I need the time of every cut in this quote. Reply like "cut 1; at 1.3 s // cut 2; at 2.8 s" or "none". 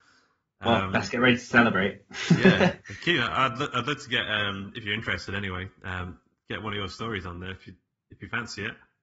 none

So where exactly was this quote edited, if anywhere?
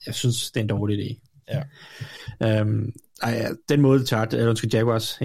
none

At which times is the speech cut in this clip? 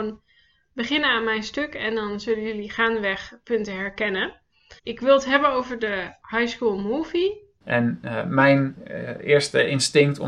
cut 1; at 4.8 s // cut 2; at 7.6 s

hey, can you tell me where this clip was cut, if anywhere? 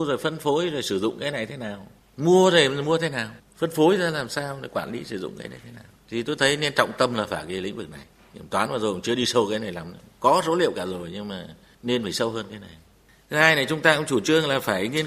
cut 1; at 3.4 s

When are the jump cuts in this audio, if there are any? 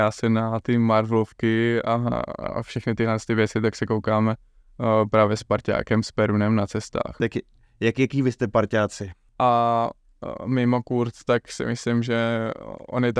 cut 1; at 7.2 s // cut 2; at 9.3 s

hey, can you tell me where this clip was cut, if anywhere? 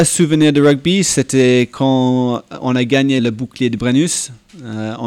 cut 1; at 3.2 s

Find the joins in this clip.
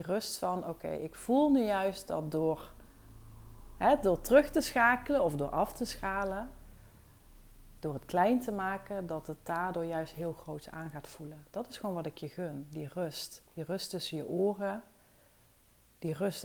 cut 1; at 13.5 s

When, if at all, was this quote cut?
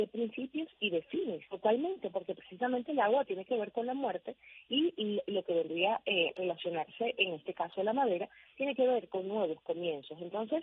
cut 1; at 1.5 s

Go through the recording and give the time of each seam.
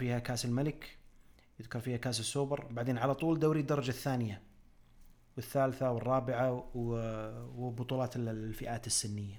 none

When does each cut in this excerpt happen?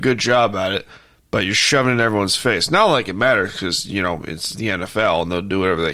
none

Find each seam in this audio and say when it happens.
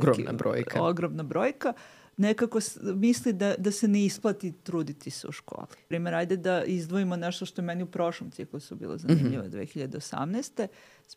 cut 1; at 5.9 s

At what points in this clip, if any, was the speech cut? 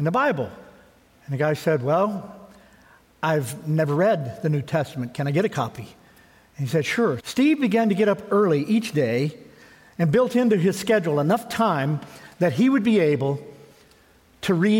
cut 1; at 7.2 s

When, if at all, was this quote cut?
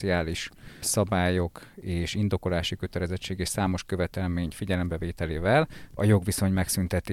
cut 1; at 6.0 s

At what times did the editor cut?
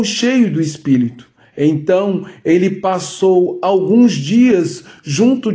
none

